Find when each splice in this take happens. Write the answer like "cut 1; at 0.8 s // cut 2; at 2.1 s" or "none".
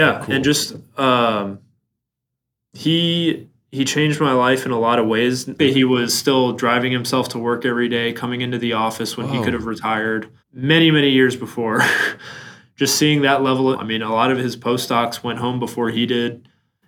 cut 1; at 5.6 s // cut 2; at 10.4 s // cut 3; at 13.7 s